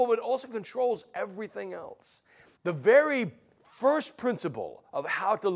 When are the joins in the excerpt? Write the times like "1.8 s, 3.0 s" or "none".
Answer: 2.6 s